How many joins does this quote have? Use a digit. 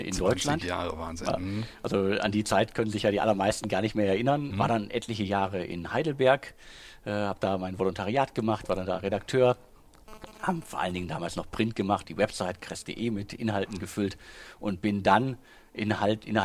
2